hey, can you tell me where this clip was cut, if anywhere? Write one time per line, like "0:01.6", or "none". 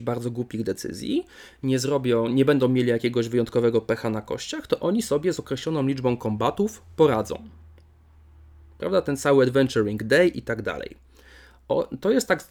none